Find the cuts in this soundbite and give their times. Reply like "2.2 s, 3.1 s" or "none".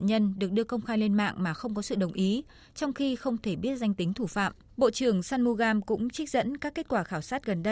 4.7 s